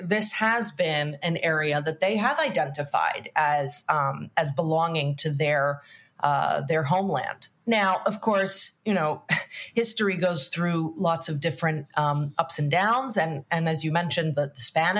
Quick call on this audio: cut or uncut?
uncut